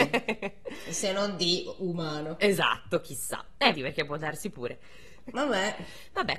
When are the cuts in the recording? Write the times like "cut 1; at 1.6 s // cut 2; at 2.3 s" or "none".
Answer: cut 1; at 3.7 s // cut 2; at 5.3 s